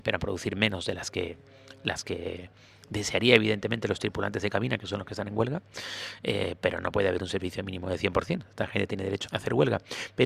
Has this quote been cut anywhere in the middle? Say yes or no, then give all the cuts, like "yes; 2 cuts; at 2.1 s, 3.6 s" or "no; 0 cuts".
yes; 1 cut; at 9.3 s